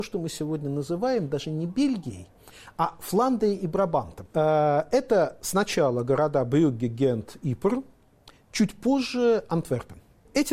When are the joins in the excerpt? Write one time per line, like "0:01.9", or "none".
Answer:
0:04.3